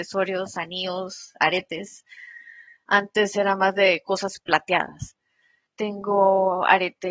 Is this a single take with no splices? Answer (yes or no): no